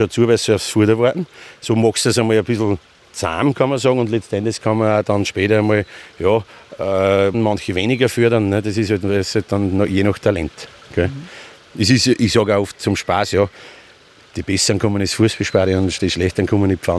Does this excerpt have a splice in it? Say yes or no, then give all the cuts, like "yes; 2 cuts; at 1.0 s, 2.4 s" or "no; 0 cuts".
yes; 1 cut; at 7.3 s